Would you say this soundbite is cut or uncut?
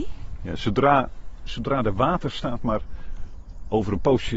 cut